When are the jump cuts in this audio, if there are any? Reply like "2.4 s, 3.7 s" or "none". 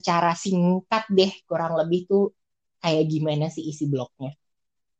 none